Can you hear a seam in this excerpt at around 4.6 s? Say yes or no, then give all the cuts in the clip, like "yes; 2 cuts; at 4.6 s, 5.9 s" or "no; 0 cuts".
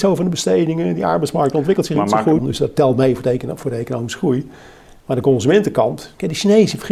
no; 1 cut; at 2.4 s